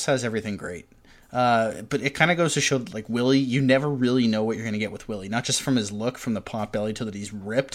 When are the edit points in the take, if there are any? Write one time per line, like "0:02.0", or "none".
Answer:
none